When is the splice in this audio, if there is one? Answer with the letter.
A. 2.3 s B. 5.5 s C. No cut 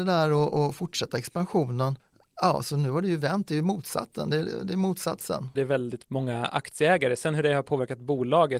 B